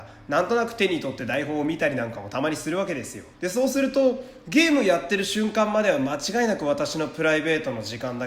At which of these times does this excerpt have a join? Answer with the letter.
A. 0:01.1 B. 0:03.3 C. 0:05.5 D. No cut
B